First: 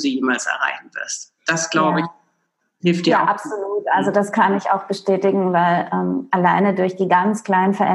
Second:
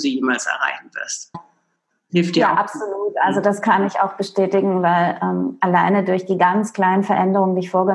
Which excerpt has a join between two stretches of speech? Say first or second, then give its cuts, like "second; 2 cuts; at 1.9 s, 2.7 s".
second; 1 cut; at 1.3 s